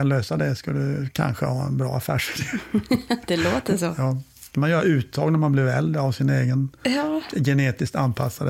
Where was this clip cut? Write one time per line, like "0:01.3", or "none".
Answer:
none

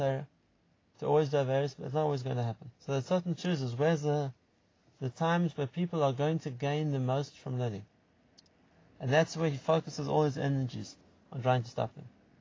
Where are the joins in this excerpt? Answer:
0:02.8

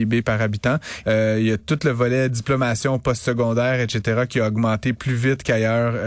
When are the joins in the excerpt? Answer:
0:01.0

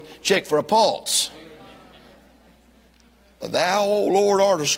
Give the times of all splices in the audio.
none

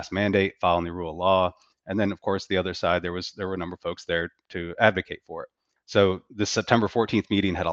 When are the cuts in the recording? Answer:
0:05.8

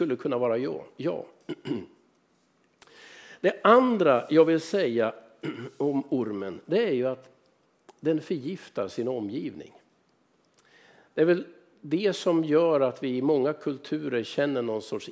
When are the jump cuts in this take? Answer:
none

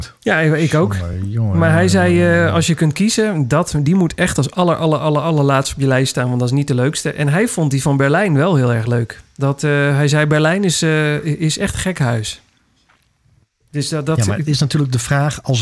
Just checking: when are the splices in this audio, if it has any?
none

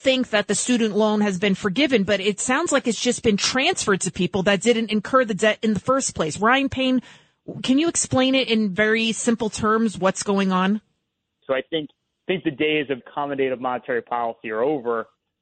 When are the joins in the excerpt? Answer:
0:11.4
0:13.0

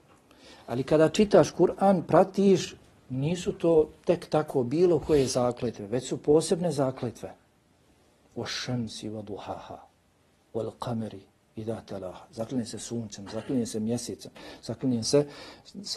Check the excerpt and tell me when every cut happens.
none

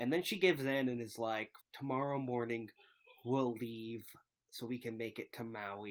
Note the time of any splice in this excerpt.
0:01.6

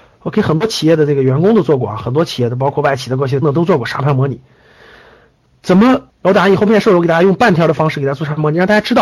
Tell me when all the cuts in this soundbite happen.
0:03.4
0:06.1

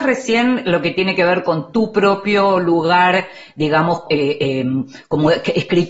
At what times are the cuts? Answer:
0:04.1

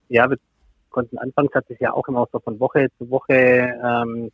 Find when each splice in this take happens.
none

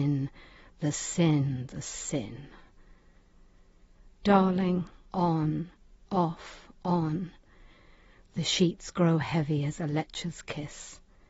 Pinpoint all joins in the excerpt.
0:05.1

